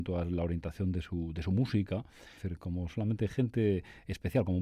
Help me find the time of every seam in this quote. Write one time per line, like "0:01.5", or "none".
0:02.4